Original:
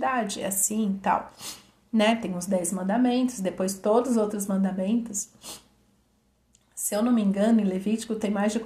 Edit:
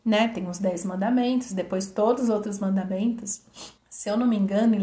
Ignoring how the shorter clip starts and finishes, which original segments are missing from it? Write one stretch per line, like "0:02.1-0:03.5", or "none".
0:05.6-0:06.6

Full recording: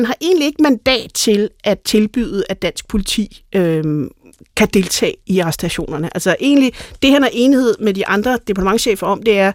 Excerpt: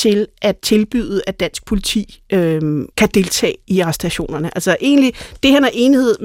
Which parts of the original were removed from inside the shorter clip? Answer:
0:04.1-0:04.5

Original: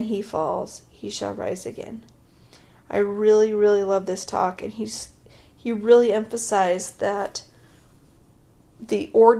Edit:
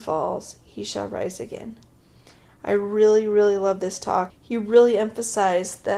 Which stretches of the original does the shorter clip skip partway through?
0:04.6-0:05.4

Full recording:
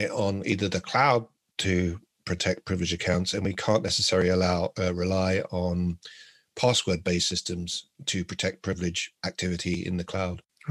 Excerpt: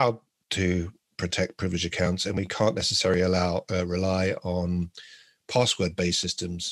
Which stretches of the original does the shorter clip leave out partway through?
none

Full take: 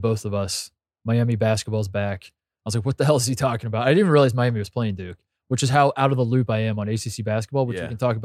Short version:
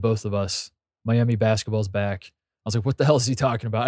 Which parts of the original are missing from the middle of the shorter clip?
none

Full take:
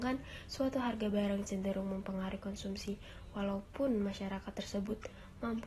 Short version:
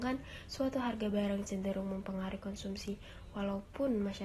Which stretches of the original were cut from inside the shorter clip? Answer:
none

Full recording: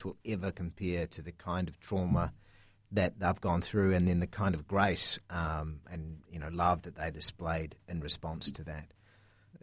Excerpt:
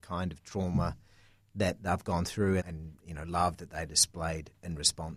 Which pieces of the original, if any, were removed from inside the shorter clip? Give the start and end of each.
0:03.9-0:05.8

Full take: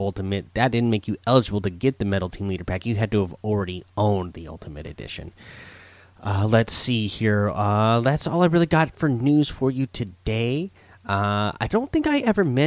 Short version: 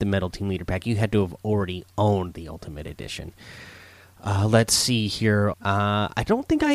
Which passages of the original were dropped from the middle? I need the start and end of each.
0:07.5-0:11.0

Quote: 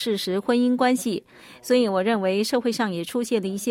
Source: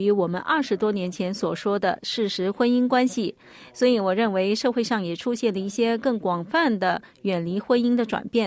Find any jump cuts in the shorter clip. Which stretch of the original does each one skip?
none

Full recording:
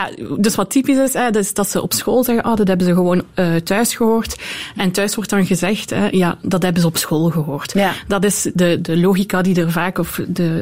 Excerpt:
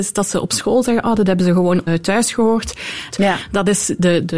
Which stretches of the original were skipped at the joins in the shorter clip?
0:03.3-0:03.5
0:04.7-0:07.7

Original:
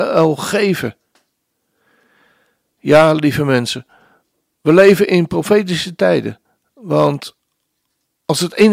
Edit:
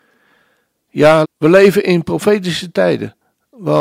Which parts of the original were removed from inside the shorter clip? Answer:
0:03.1-0:04.5

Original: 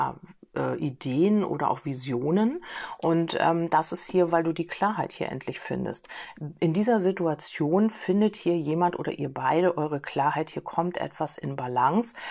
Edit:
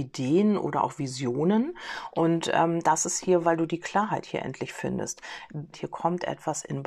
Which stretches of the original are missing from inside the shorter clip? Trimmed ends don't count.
0:06.6-0:10.5

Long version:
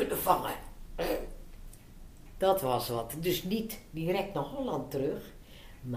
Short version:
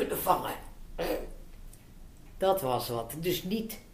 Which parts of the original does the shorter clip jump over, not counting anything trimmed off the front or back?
none

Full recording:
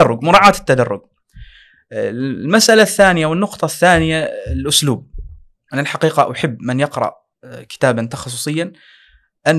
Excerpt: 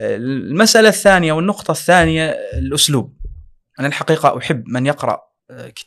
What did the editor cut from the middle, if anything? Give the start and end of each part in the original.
none

